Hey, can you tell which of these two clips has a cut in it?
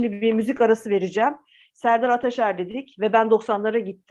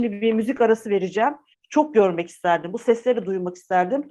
second; 1 cut; at 1.5 s

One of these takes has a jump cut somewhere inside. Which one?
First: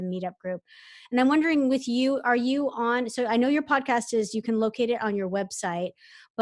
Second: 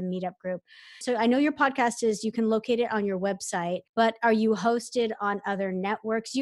second; 2 cuts; at 1.0 s, 3.9 s

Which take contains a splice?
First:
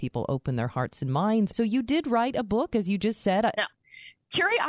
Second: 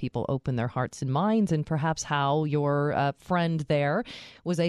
first; 2 cuts; at 1.5 s, 3.5 s

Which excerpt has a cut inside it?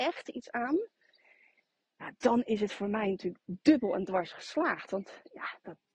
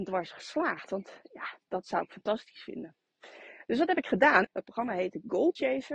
second; 2 cuts; at 1.6 s, 4.4 s

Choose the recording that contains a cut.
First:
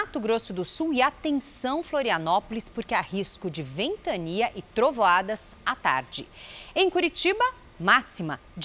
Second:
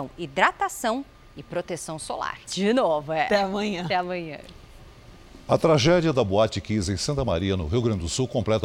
second; 1 cut; at 2.5 s

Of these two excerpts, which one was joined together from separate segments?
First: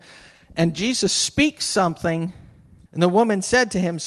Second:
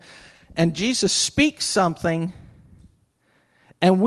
first; 1 cut; at 2.9 s

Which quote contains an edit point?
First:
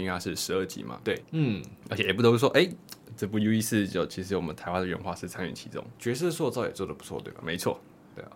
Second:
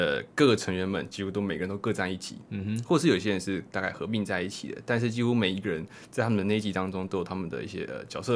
first; 1 cut; at 1.2 s

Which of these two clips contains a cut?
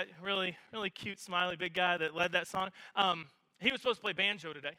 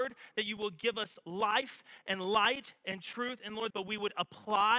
second; 1 cut; at 3.7 s

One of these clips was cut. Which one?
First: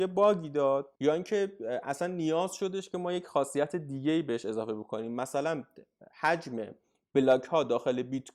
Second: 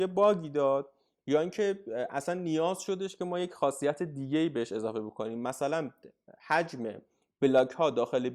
first; 1 cut; at 1.0 s

